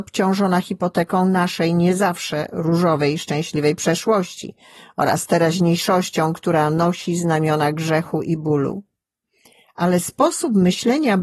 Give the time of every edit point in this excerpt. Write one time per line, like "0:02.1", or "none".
none

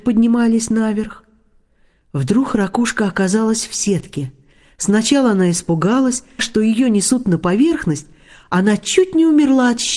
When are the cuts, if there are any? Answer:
0:06.4

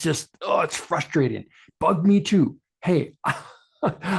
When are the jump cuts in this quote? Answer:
none

